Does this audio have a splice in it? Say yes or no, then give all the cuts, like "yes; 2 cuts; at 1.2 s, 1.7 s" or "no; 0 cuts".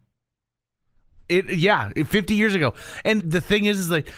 yes; 1 cut; at 3.2 s